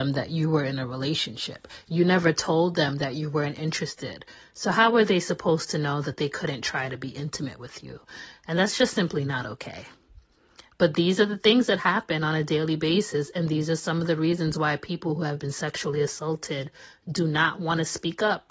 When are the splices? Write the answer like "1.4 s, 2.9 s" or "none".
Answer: none